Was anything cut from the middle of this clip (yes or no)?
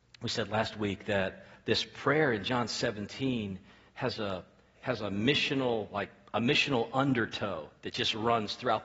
no